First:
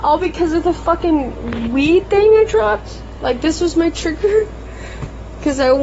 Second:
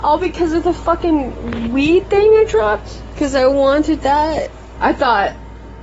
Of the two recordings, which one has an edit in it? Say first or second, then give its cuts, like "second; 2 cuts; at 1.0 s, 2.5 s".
second; 2 cuts; at 3.2 s, 4.8 s